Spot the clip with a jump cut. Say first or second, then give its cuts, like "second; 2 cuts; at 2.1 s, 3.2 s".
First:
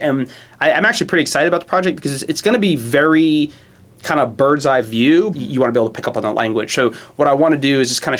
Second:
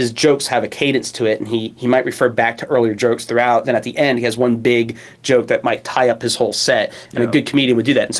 first; 1 cut; at 5.3 s